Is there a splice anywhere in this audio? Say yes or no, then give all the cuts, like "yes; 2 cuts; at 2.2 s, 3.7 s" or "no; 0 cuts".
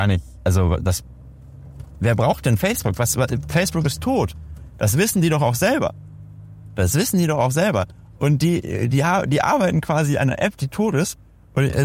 no; 0 cuts